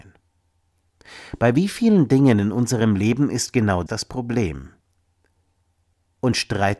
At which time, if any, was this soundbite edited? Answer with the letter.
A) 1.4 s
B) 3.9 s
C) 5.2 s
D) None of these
B